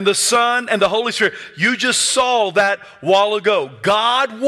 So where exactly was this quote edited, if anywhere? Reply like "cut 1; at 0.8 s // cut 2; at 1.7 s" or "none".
none